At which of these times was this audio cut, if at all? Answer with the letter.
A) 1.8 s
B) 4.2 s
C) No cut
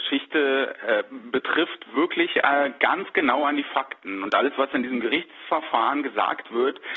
C